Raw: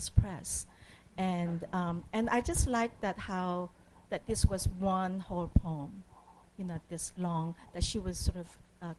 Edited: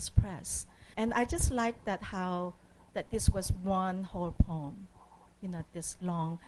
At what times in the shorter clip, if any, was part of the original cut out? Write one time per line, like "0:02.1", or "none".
0:00.9